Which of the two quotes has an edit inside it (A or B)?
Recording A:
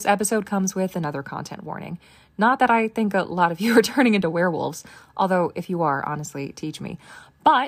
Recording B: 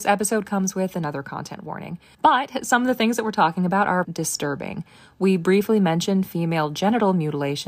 B